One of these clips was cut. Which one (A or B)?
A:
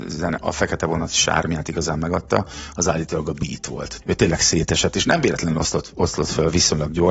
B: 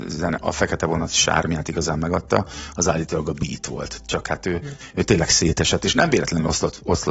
A